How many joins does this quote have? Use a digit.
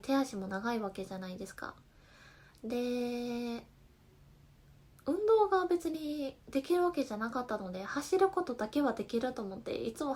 1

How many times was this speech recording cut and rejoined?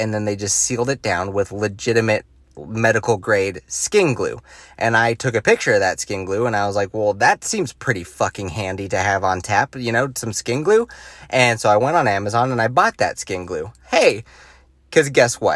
0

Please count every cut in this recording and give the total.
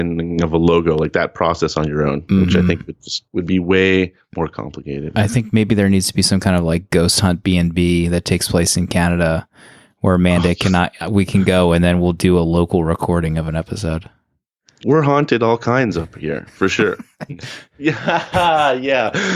2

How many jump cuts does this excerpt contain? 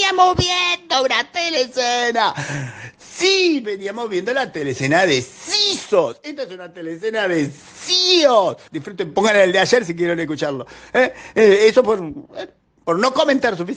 1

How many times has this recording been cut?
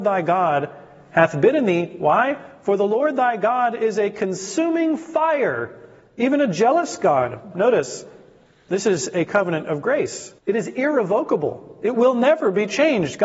2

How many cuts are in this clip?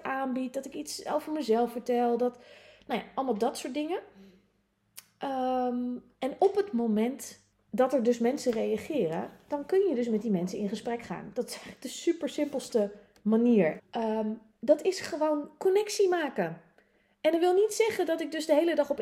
2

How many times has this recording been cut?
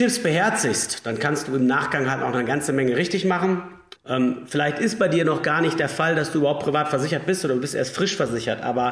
1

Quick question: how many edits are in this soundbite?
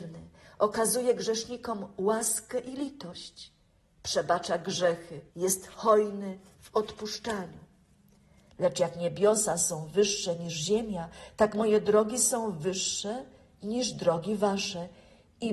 2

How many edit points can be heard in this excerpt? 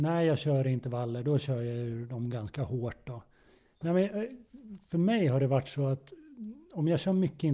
2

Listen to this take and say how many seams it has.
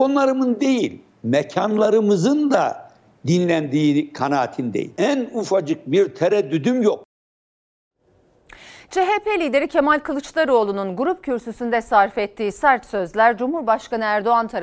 0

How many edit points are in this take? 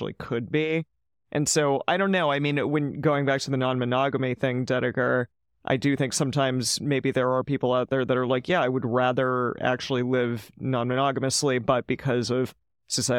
0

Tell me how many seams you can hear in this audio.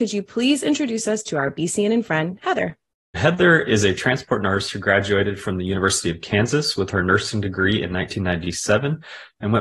1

